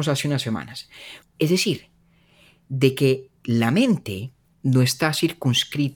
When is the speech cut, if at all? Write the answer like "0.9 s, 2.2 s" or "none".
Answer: 1.2 s, 4.5 s